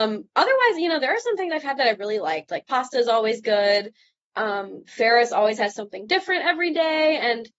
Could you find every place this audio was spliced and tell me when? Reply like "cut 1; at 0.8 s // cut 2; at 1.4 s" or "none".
none